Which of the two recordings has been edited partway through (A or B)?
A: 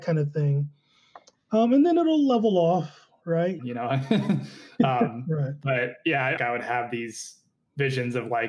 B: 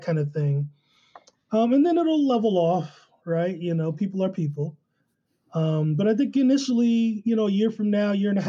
A